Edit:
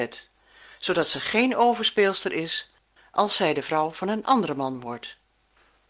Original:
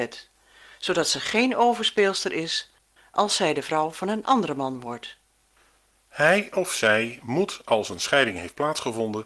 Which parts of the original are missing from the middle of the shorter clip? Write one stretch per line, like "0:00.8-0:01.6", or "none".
none